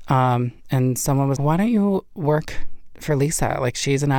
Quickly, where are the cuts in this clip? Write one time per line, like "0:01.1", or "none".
0:01.4